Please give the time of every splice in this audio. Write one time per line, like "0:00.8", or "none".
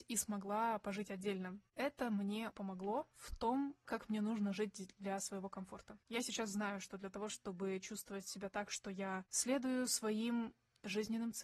0:02.5
0:03.9
0:07.3